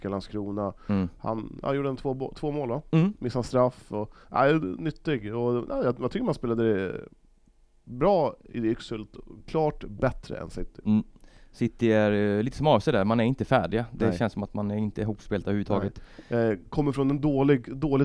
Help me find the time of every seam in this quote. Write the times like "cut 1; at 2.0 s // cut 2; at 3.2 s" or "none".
none